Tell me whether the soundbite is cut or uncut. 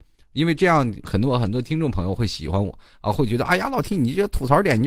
cut